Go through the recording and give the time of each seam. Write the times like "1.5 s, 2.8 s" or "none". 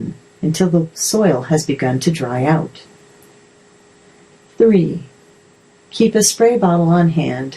none